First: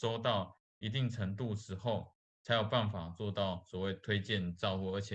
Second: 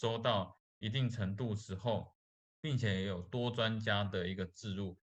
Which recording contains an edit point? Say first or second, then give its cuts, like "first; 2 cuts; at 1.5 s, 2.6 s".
first; 1 cut; at 2.3 s